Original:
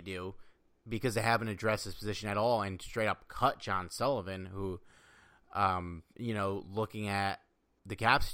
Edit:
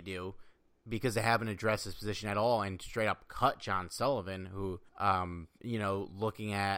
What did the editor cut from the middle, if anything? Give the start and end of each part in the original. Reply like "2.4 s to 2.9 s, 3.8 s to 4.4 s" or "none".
4.9 s to 5.4 s

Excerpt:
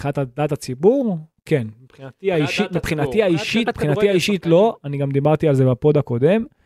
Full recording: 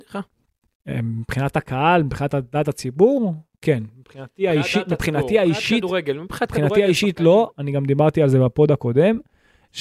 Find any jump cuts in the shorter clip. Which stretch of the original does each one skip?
5.8 s to 6.4 s

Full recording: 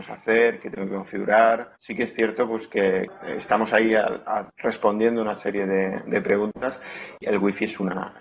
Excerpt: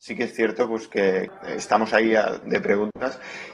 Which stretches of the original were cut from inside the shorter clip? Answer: 4.2 s to 6.0 s

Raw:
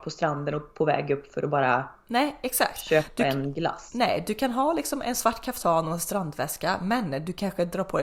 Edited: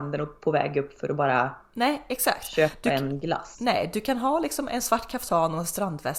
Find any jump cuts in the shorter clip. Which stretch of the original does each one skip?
none

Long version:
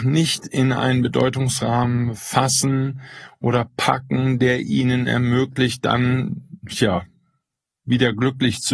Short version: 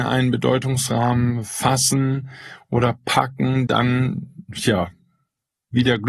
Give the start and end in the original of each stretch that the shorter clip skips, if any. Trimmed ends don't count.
4.4 s to 5.8 s

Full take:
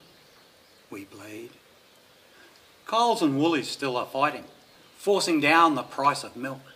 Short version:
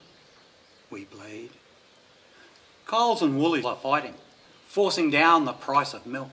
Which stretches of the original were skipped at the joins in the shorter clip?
3.6 s to 3.9 s

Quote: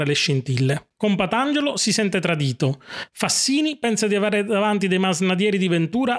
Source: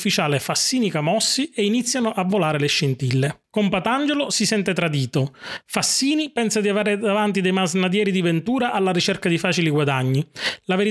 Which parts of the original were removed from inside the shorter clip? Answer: none

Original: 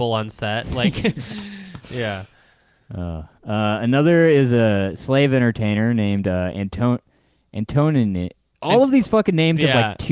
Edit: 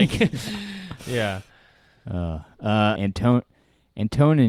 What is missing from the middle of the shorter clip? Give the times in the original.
3.8 s to 6.5 s

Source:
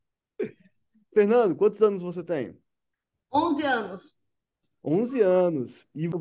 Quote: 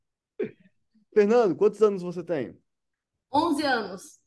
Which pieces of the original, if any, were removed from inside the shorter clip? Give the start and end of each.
none

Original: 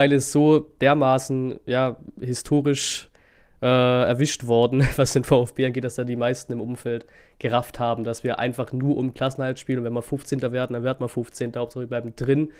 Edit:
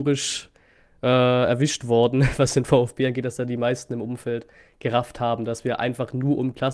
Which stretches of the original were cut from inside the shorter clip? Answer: none

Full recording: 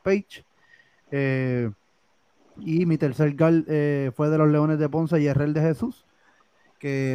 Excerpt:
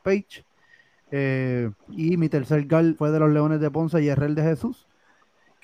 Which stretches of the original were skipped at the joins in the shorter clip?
1.8 s to 2.5 s, 3.7 s to 4.1 s

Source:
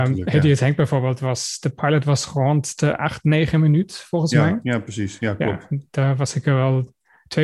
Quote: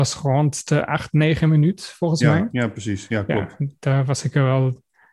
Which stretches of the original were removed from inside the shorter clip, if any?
none

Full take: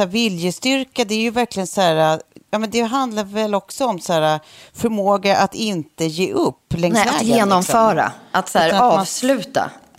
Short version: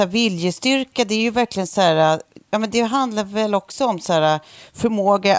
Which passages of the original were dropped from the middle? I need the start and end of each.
none

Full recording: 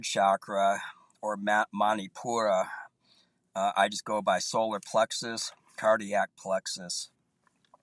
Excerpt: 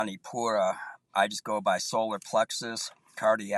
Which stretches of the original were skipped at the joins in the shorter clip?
3.0 s to 3.7 s

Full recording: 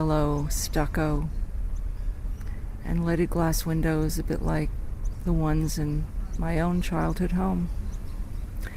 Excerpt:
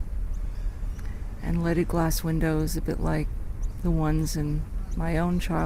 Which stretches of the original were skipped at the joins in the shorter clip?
none

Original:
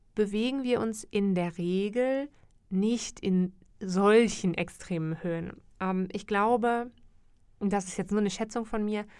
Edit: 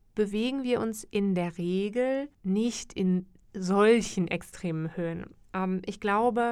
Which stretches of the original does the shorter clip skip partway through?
2.3 s to 2.6 s

